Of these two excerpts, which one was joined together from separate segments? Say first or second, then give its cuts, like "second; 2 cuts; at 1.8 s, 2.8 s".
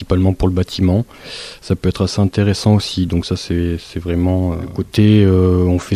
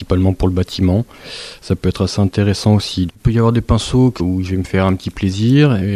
second; 2 cuts; at 3.1 s, 4.2 s